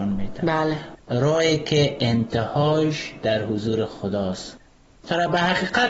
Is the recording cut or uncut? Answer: cut